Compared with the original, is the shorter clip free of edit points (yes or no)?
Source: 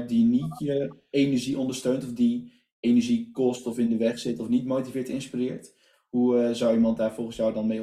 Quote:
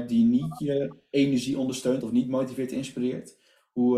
no